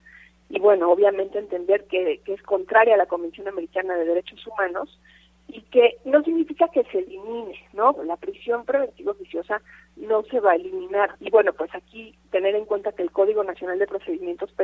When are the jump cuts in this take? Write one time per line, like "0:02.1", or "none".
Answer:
0:08.0
0:11.2